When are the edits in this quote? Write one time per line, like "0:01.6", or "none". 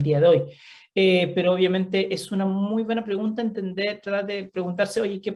none